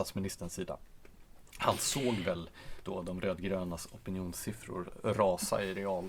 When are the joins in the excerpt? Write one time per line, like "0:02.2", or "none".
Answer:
none